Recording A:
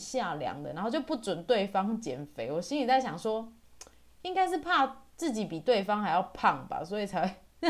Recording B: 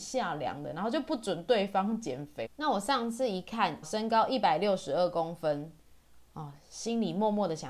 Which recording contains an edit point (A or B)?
B